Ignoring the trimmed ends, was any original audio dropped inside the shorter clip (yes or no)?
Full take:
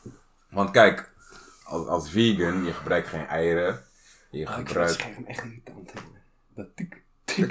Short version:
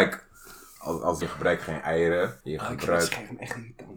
yes